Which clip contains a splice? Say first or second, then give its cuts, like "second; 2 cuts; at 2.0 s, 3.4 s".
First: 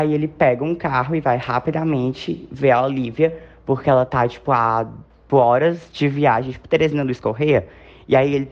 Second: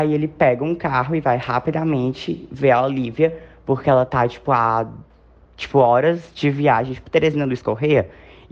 first; 1 cut; at 5.3 s